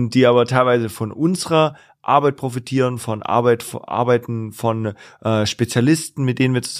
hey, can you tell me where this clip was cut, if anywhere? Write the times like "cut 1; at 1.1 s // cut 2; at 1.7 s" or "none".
none